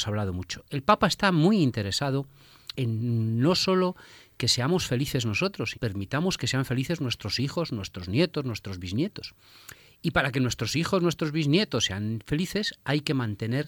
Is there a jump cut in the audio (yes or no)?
yes